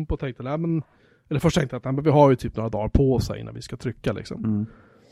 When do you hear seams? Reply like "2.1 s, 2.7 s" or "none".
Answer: none

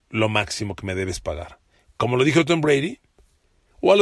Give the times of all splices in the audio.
1.9 s

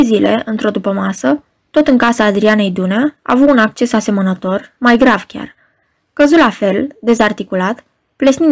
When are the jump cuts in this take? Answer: none

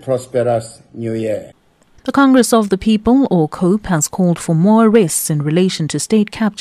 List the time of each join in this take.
none

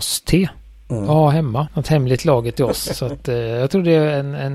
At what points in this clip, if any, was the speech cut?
1.7 s

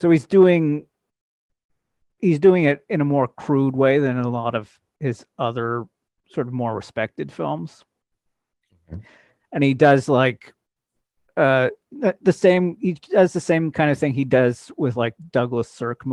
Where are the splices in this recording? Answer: 9.4 s

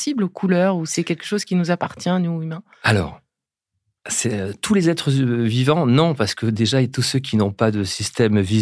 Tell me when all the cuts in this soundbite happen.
none

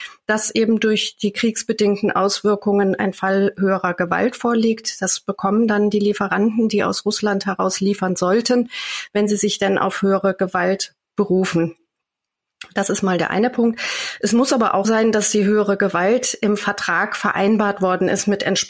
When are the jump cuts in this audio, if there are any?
14.8 s

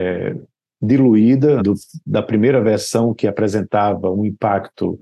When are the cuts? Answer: 1.6 s

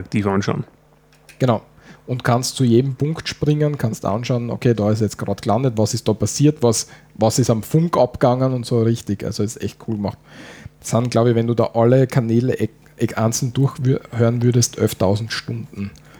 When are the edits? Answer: none

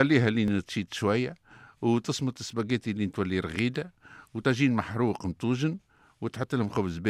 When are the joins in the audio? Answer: none

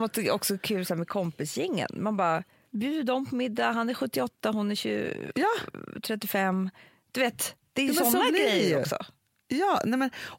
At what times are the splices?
2.6 s

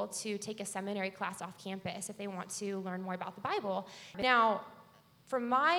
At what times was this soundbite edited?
4.1 s

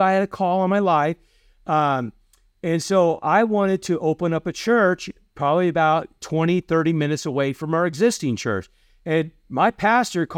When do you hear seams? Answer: none

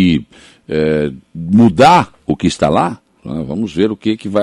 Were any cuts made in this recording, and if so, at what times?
3.2 s

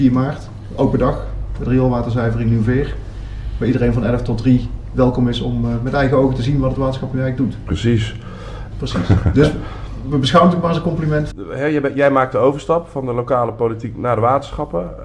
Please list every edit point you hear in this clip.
8.7 s, 11.3 s

